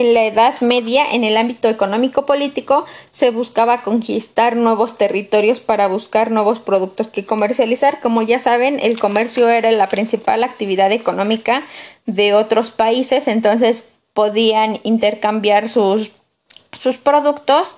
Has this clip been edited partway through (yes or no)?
no